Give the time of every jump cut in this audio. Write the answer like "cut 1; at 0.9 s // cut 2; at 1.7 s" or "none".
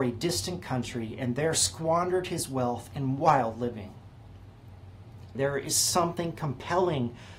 cut 1; at 5.3 s